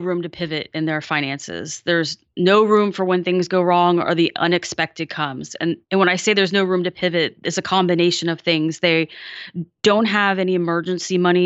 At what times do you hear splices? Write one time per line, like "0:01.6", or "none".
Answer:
0:05.8

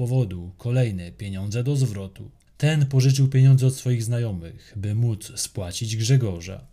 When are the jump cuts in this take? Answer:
0:02.4

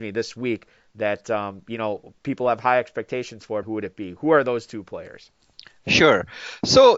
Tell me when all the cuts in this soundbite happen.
0:03.6

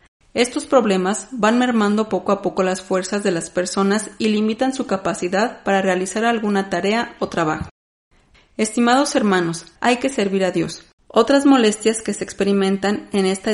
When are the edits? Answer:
0:09.8
0:11.0

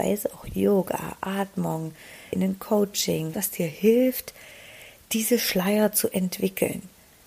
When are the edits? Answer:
0:02.3
0:03.3

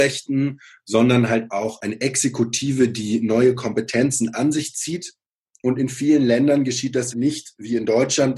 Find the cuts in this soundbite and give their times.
0:07.1

